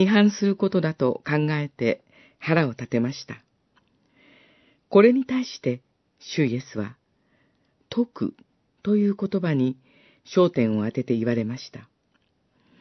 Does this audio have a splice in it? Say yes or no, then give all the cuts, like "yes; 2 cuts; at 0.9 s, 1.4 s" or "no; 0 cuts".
no; 0 cuts